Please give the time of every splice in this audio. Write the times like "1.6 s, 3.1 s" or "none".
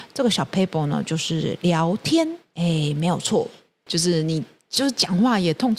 3.9 s